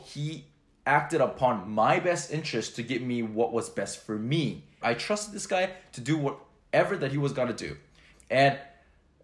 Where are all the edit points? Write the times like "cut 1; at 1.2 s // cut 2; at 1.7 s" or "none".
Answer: cut 1; at 4.8 s // cut 2; at 8.1 s

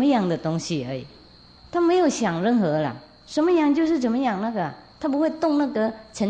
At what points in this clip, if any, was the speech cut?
cut 1; at 1.6 s // cut 2; at 4.9 s

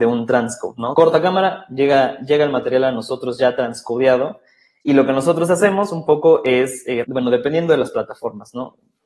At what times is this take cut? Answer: cut 1; at 0.9 s // cut 2; at 7.0 s

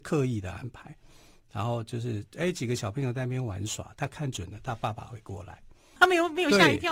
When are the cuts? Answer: cut 1; at 6.0 s

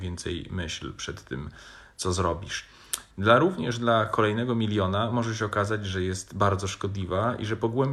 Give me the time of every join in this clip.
cut 1; at 3.1 s

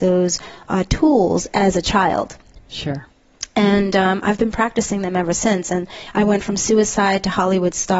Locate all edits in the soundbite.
none

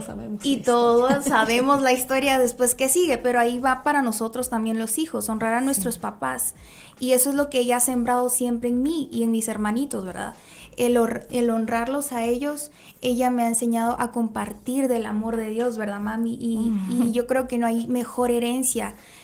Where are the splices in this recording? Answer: none

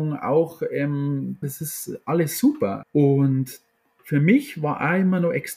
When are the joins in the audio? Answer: cut 1; at 1.4 s // cut 2; at 2.8 s

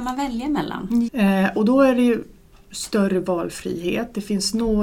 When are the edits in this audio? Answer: cut 1; at 1.1 s

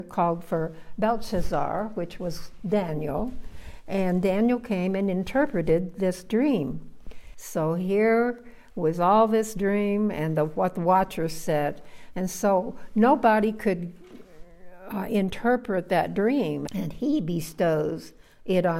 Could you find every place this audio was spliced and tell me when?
cut 1; at 7.3 s // cut 2; at 16.7 s

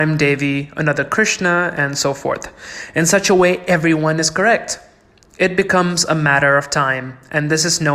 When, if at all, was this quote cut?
none

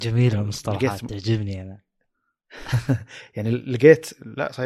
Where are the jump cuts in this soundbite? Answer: none

